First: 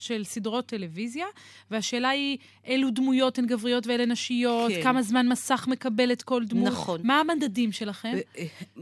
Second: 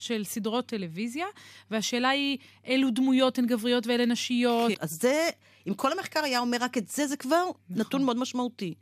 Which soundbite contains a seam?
second; 1 cut; at 4.7 s

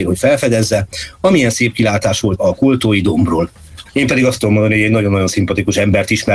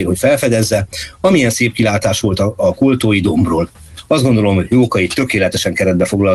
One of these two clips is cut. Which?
first; 2 cuts; at 2.4 s, 3.9 s

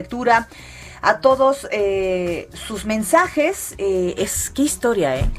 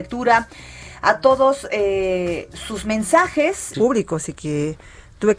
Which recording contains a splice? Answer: second; 1 cut; at 3.7 s

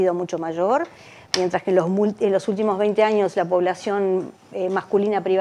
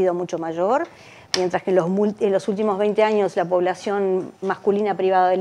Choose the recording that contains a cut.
second; 1 cut; at 4.4 s

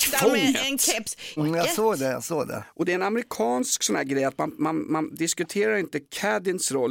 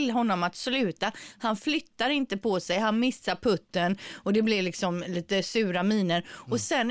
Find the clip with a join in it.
first; 1 cut; at 1.4 s

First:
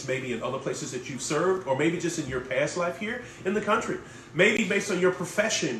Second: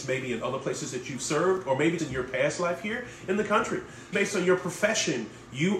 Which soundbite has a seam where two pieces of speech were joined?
second; 2 cuts; at 2.0 s, 4.1 s

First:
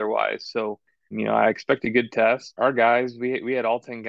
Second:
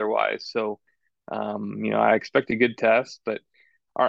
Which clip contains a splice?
first; 2 cuts; at 1.1 s, 2.6 s

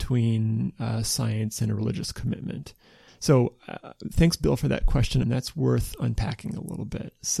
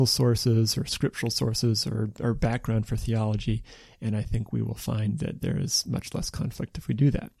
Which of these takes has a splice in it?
first; 2 cuts; at 3.1 s, 5.2 s

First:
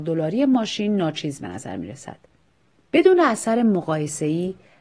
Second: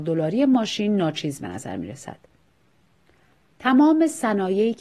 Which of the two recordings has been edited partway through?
first; 1 cut; at 2.8 s

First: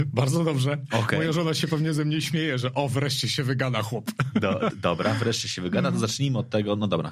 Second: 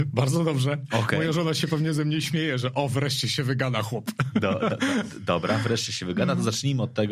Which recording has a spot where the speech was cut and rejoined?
first; 1 cut; at 4.7 s

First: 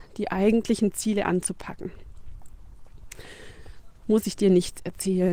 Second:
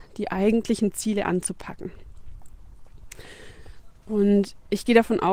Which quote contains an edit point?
first; 1 cut; at 4.0 s

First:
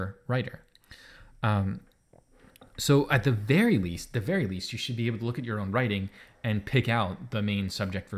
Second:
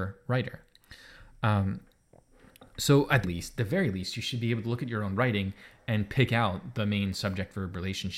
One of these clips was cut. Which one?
second; 1 cut; at 3.2 s

